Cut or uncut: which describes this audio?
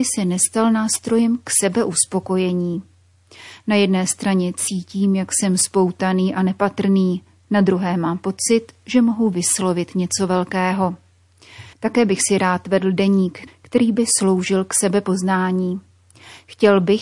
cut